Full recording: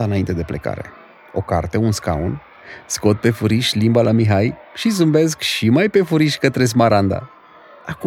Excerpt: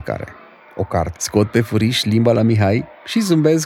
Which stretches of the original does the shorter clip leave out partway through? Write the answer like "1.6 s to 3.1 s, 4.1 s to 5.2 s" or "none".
1.7 s to 2.8 s